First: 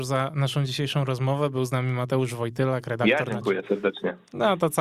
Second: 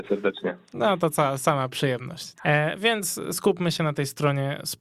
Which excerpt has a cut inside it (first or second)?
second